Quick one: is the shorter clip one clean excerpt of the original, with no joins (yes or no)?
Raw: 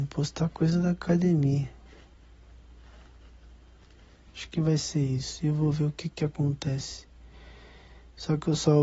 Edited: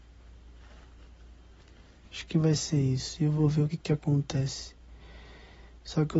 no